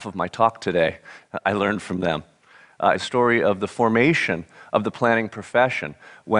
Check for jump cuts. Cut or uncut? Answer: cut